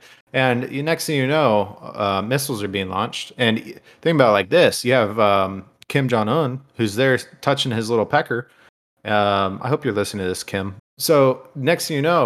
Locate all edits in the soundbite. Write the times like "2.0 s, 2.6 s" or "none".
10.8 s